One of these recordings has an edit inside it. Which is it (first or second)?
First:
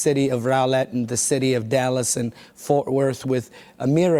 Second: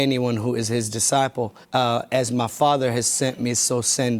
second